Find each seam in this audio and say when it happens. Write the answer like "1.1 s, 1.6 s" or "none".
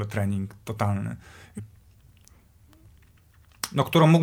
1.6 s